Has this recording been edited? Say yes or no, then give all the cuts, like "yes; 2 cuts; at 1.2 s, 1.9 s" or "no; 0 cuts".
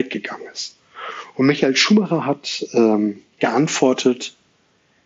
no; 0 cuts